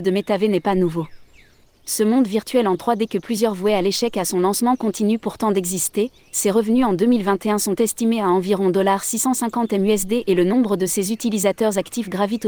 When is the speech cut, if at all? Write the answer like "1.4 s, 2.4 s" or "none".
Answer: 1.6 s